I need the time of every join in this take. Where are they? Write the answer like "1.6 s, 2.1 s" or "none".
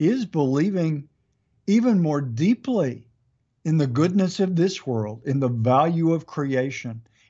none